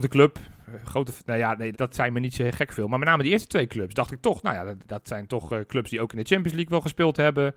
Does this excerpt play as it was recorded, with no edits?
no; 1 cut; at 1.7 s

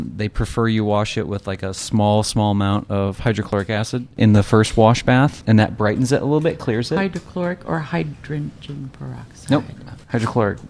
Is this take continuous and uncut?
yes; 0 cuts

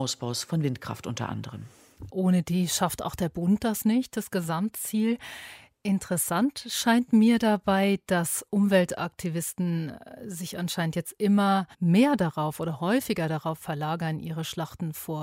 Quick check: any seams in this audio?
yes; 2 cuts; at 2.1 s, 11.7 s

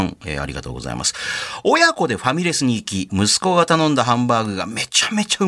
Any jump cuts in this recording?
yes; 1 cut; at 3.1 s

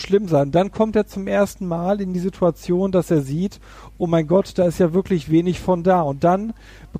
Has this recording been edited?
no; 0 cuts

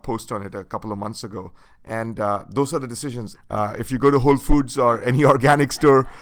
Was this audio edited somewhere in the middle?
yes; 2 cuts; at 1.7 s, 3.4 s

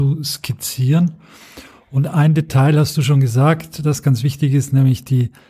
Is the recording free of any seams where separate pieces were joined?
yes; 0 cuts

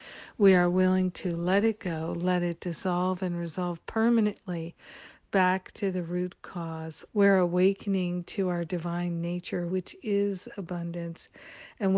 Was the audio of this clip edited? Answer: yes; 2 cuts; at 7.1 s, 9.7 s

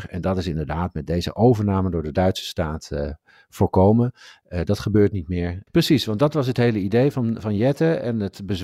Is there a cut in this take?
yes; 1 cut; at 5.7 s

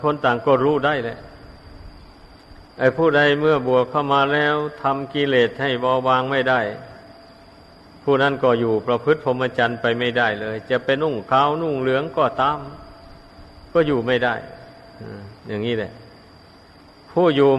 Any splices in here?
yes; 2 cuts; at 11.0 s, 15.4 s

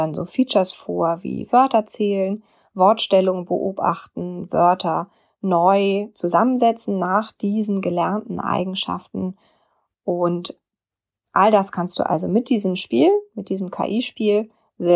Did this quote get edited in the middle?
no; 0 cuts

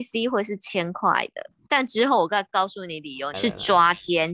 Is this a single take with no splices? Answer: no; 2 cuts; at 1.7 s, 3.3 s

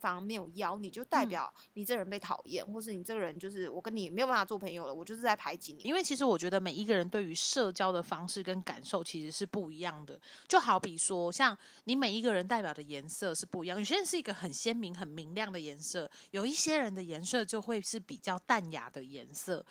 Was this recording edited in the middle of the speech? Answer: yes; 1 cut; at 5.8 s

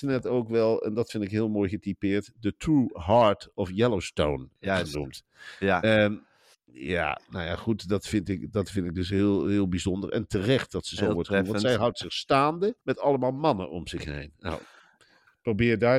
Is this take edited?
yes; 1 cut; at 12.8 s

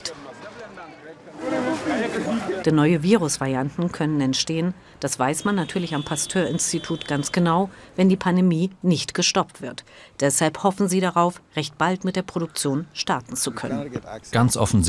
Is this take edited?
yes; 1 cut; at 2.6 s

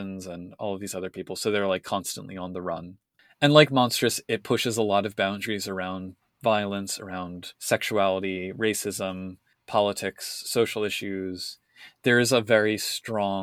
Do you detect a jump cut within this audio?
no; 0 cuts

